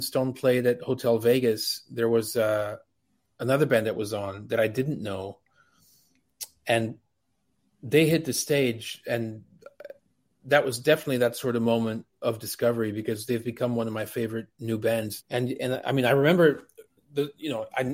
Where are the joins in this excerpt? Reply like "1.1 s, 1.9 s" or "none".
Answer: 15.2 s